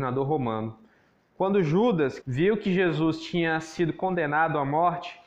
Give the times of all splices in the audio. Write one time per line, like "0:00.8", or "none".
0:02.2

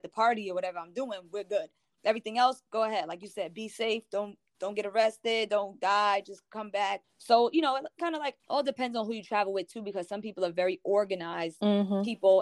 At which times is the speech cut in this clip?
0:07.0
0:08.4

